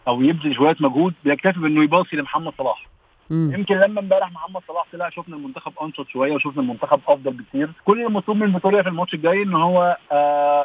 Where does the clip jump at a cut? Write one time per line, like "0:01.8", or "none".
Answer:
0:07.8